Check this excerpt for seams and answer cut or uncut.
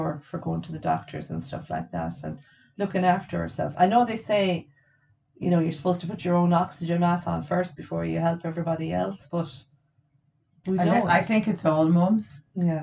uncut